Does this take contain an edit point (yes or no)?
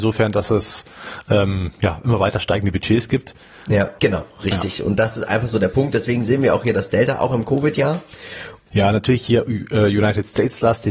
yes